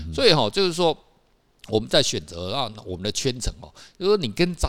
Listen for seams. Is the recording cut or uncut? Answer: uncut